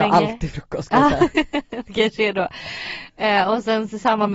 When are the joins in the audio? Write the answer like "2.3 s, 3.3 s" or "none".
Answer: none

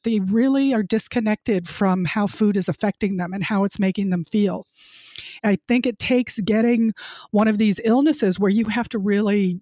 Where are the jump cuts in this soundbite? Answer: 5.4 s

